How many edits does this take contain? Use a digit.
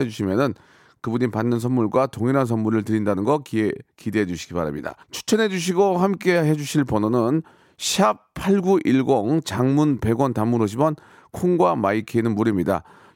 1